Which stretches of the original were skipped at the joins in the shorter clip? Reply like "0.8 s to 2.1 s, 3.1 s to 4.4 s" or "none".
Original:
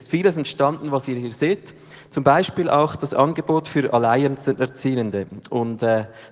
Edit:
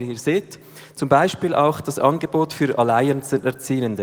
none